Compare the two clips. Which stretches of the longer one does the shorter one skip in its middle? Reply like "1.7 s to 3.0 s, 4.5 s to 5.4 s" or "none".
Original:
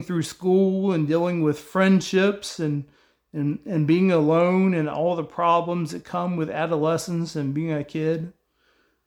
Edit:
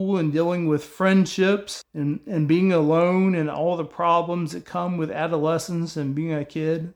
2.6 s to 3.2 s